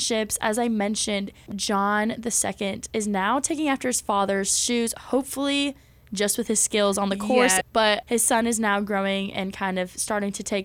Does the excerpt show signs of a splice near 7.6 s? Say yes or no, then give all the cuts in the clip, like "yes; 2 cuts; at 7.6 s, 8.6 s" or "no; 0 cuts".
yes; 2 cuts; at 1.5 s, 7.6 s